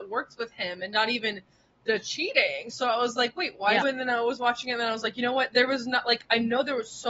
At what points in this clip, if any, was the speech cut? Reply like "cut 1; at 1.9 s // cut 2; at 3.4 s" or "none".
cut 1; at 3.8 s